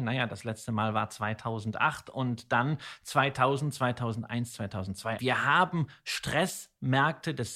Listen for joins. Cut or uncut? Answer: cut